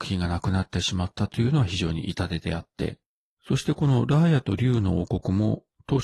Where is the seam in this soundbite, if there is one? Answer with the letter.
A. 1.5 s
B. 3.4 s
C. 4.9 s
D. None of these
B